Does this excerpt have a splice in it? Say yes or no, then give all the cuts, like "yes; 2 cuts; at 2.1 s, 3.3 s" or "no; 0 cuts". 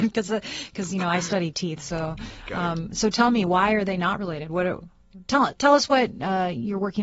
no; 0 cuts